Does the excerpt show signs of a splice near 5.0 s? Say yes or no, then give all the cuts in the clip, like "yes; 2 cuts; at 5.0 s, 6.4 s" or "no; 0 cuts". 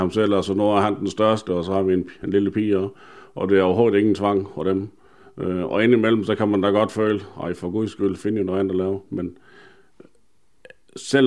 no; 1 cut; at 1.5 s